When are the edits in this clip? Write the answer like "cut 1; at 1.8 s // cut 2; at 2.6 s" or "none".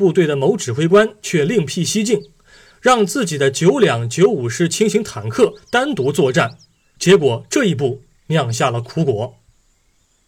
none

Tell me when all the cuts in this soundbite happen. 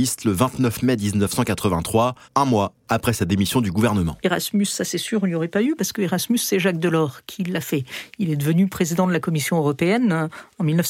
cut 1; at 2.2 s // cut 2; at 4.2 s

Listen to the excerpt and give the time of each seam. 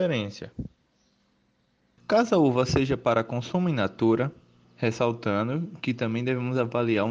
cut 1; at 2.0 s // cut 2; at 4.6 s

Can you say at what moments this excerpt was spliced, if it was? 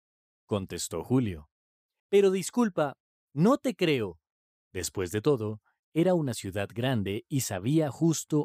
cut 1; at 2.0 s // cut 2; at 4.6 s

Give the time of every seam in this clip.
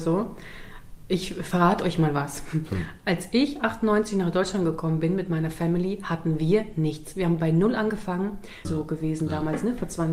cut 1; at 8.6 s

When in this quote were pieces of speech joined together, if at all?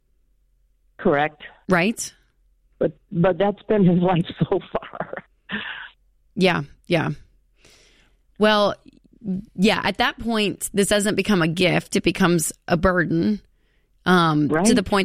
none

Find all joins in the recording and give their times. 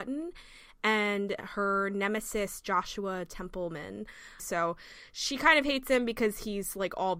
cut 1; at 4.4 s

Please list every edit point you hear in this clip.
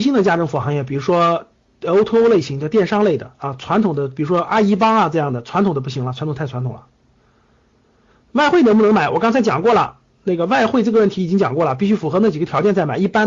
none

